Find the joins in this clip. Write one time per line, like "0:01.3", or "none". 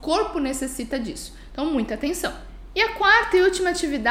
none